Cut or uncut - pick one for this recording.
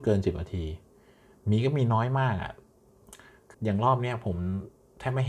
cut